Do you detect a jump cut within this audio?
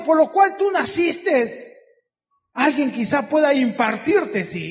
yes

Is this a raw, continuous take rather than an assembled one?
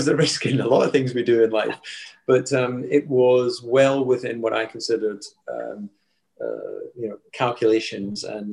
yes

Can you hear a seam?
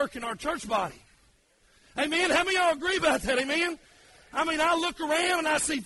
no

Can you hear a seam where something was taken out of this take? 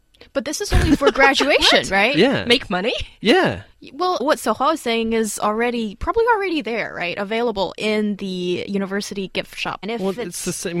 yes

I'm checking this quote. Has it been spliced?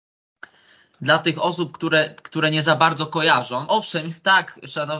no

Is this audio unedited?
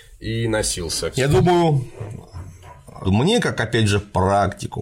no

